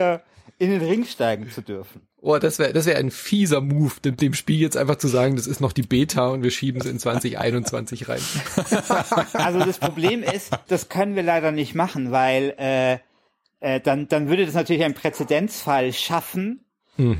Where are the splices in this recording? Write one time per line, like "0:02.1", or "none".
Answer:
0:10.7